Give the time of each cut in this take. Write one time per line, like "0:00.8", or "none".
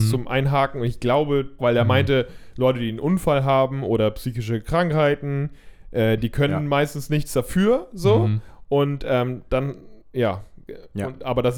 0:01.6